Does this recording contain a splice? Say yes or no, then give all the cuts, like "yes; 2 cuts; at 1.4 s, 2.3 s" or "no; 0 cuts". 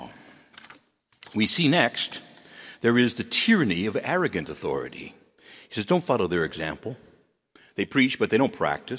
no; 0 cuts